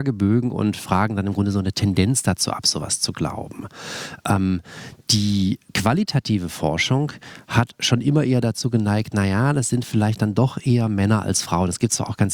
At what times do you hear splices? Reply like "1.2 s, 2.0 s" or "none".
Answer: 5.7 s